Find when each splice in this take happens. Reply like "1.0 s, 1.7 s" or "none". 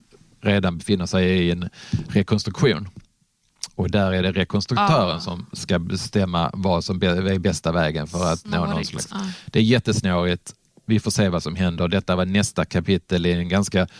none